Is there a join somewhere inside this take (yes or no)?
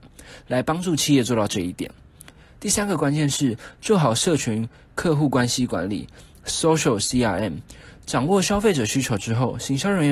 no